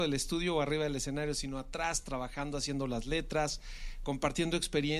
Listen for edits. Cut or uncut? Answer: uncut